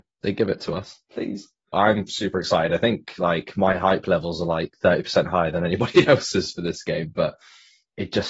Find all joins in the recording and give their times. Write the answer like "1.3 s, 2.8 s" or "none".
1.7 s

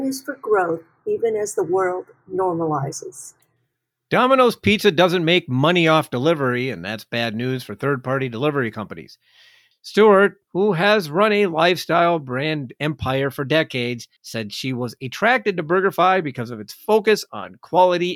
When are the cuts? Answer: 9.7 s, 14.2 s

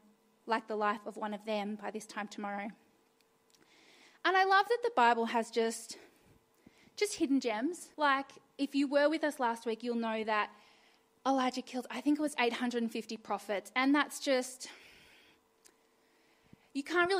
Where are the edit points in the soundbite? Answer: 7.9 s

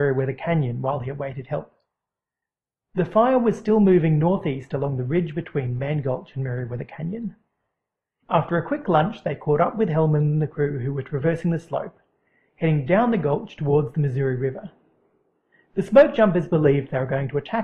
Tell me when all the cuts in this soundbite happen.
8.2 s

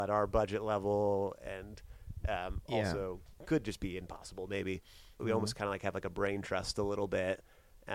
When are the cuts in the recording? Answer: 5.2 s

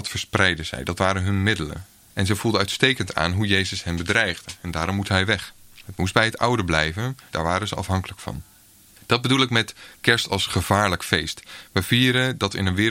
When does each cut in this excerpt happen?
7.3 s

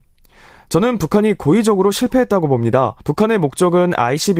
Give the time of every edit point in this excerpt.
none

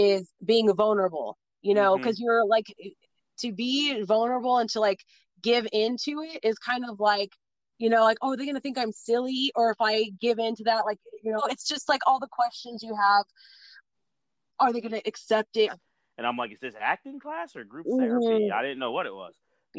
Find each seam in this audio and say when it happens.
11.4 s, 14.5 s, 15.7 s

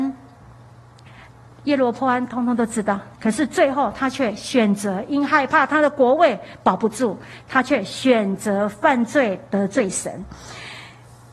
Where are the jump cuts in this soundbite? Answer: 1.1 s, 3.1 s

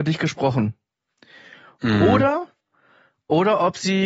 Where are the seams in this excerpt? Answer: 1.7 s

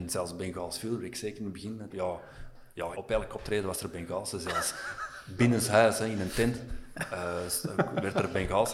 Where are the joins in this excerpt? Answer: 1.9 s, 2.9 s

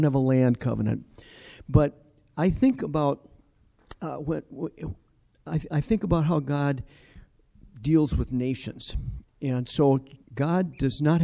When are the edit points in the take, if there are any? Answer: 10.2 s

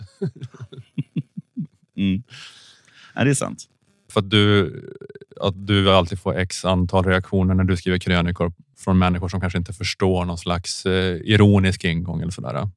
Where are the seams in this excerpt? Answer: 4.1 s

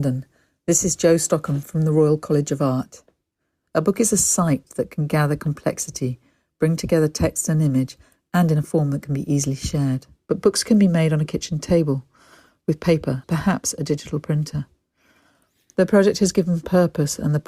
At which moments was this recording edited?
3.6 s, 10.3 s, 13.2 s

